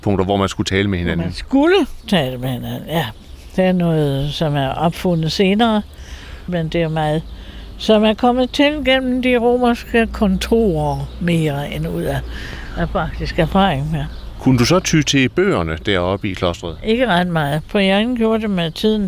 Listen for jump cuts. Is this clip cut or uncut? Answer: cut